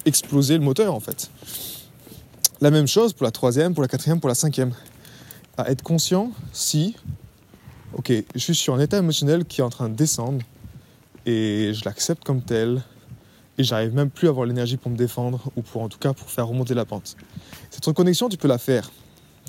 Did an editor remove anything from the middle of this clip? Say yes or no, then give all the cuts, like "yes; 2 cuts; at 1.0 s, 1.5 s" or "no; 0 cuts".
yes; 2 cuts; at 5.4 s, 17.7 s